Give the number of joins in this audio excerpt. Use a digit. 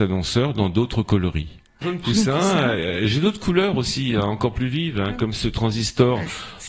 1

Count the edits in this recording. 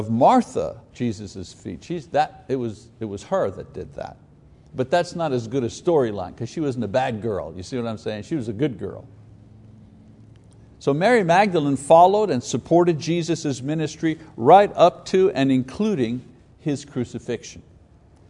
1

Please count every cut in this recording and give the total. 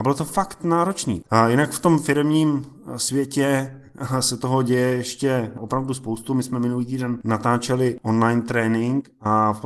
1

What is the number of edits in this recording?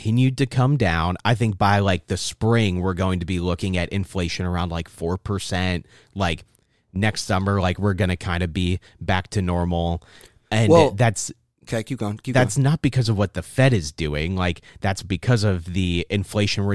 0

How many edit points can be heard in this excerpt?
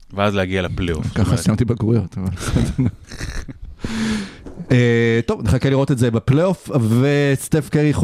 0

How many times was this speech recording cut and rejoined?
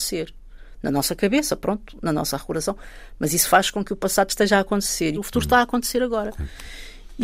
1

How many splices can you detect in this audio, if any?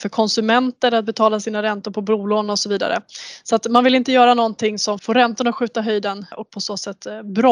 2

